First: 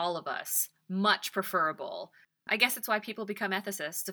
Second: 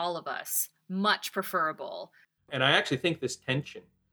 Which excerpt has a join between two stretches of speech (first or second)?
second